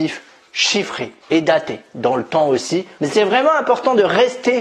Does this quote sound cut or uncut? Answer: cut